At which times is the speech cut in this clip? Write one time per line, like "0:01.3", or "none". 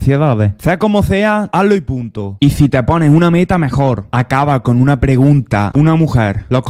0:05.7